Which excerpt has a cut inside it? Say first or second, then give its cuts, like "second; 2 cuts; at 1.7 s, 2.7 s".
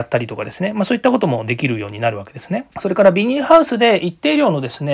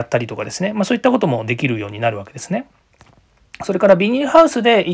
first; 1 cut; at 2.7 s